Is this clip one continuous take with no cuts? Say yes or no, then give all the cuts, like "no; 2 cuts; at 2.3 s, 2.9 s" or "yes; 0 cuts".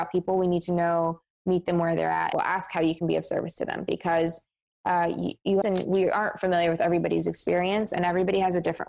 no; 2 cuts; at 2.3 s, 5.6 s